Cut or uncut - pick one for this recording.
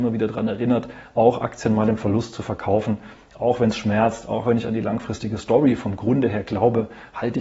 uncut